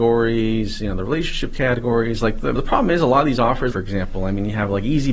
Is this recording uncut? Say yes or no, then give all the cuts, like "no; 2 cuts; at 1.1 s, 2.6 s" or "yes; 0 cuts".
no; 2 cuts; at 2.6 s, 3.7 s